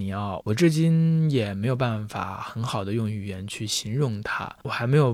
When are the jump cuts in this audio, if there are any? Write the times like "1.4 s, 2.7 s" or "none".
none